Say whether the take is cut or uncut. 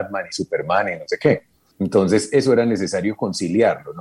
cut